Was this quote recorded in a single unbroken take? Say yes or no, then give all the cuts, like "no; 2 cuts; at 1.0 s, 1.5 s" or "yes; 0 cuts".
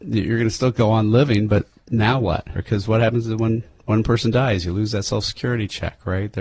no; 1 cut; at 2.5 s